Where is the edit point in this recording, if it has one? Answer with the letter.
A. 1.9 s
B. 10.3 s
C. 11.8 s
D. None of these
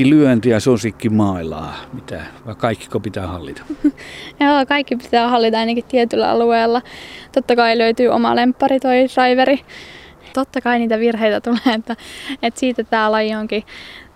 B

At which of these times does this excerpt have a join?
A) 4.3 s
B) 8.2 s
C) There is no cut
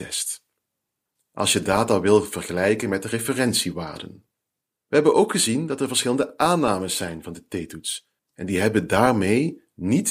B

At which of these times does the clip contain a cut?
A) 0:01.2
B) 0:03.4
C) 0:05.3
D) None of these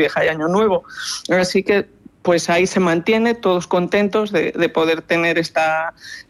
D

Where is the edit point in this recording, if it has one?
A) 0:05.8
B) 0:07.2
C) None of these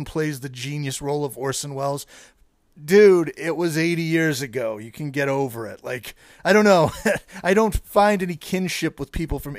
C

